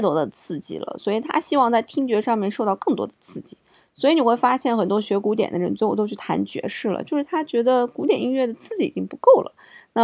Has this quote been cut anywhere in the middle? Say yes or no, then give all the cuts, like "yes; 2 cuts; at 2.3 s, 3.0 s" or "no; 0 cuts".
no; 0 cuts